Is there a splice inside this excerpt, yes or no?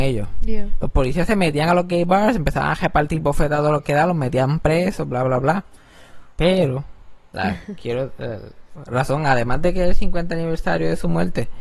yes